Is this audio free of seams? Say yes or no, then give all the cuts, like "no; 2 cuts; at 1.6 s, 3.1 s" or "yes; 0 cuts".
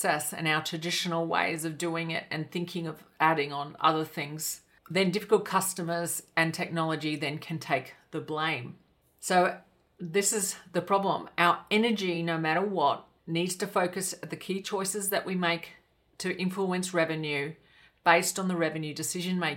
yes; 0 cuts